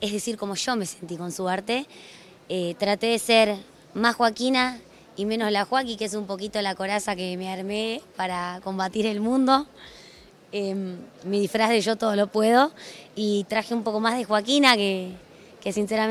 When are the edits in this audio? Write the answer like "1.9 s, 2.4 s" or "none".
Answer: none